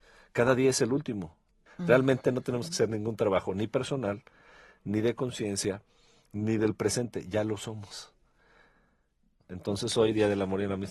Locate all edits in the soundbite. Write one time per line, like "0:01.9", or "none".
0:01.7
0:09.4